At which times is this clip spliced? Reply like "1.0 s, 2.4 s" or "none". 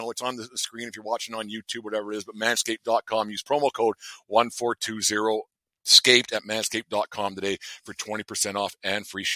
none